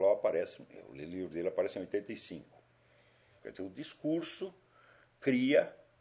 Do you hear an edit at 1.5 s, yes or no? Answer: no